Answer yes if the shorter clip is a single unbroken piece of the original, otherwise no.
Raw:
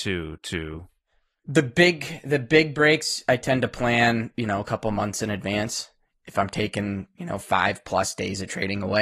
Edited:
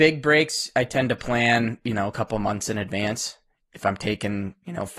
yes